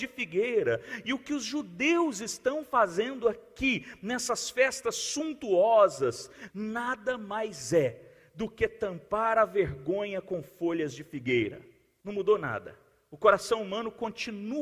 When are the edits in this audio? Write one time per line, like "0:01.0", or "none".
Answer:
0:06.5
0:12.0